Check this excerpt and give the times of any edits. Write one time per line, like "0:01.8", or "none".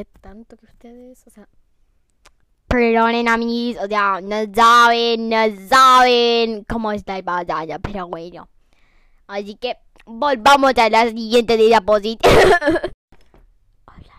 none